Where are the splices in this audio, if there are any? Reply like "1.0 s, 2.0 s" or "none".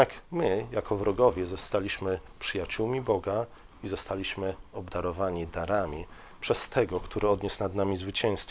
none